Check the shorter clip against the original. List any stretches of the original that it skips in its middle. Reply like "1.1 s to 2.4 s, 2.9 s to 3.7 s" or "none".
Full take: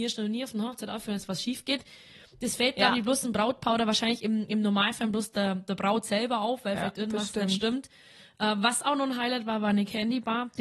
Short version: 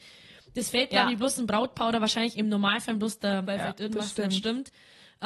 4.2 s to 4.5 s, 5.6 s to 6.6 s